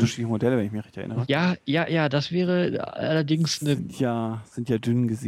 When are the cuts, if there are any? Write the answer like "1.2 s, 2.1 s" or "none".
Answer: 1.3 s